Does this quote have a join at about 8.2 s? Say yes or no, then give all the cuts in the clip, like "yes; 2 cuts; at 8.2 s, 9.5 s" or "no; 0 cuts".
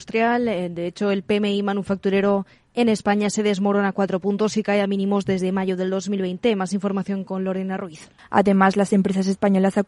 yes; 1 cut; at 8.2 s